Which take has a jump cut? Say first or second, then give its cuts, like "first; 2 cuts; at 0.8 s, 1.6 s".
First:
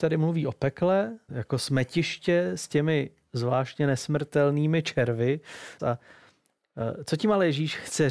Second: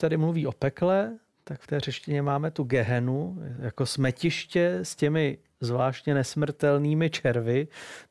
first; 2 cuts; at 1.3 s, 5.8 s